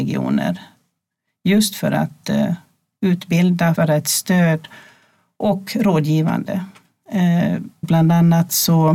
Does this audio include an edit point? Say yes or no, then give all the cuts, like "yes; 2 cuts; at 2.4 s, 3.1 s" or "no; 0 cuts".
yes; 2 cuts; at 3.8 s, 7.8 s